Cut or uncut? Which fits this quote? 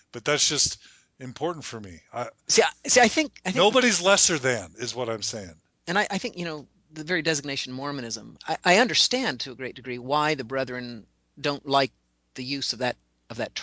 cut